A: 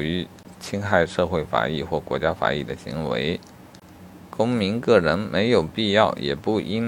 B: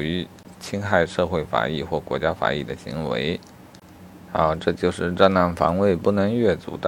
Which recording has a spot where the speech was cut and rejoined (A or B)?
B